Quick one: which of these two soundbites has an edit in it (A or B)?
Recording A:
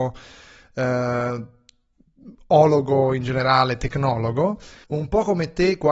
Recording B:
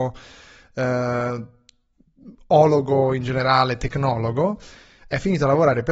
A